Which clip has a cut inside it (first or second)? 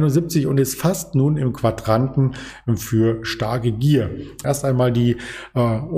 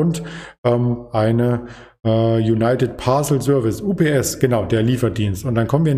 first